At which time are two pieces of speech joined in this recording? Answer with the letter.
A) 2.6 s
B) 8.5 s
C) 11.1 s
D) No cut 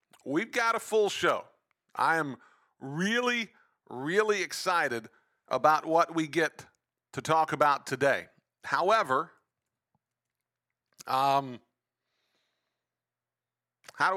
D